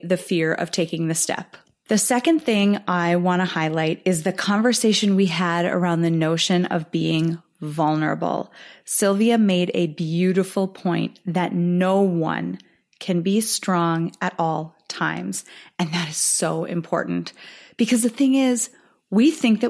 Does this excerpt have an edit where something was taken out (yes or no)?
no